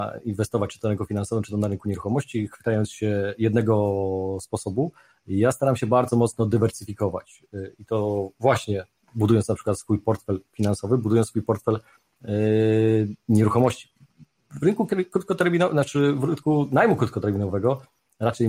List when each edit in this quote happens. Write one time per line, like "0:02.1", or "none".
none